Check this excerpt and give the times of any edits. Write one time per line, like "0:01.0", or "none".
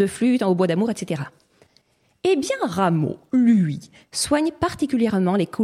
0:04.1